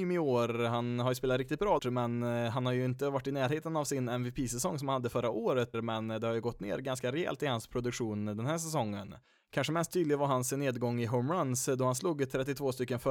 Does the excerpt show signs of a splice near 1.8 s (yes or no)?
yes